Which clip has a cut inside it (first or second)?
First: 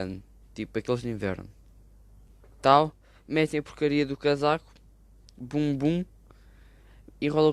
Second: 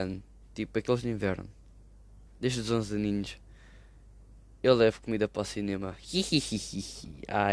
second